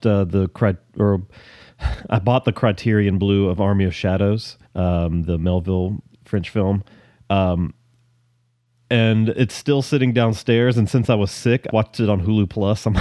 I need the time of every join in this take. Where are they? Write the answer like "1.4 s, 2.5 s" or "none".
4.6 s, 11.7 s